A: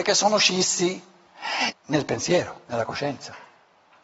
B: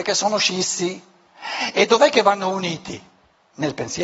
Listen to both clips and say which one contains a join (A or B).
A